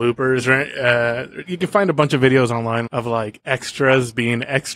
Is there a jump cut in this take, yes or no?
yes